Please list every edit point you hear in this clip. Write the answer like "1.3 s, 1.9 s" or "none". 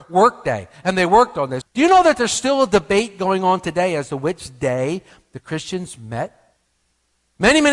1.6 s